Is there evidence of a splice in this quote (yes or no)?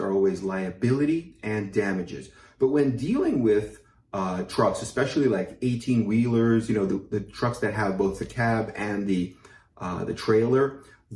no